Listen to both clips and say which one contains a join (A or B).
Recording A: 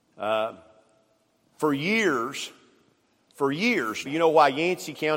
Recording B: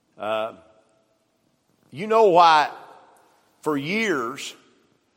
A